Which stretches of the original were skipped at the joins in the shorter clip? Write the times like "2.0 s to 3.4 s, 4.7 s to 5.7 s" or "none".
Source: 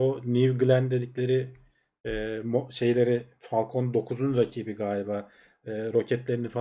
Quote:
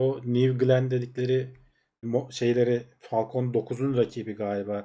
2.0 s to 2.4 s